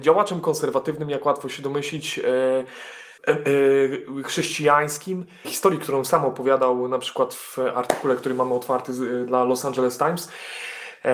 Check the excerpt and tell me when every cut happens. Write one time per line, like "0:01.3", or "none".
0:03.2
0:05.4